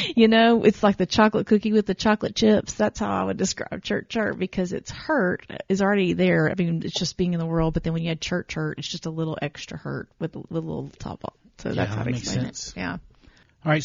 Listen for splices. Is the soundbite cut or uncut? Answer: uncut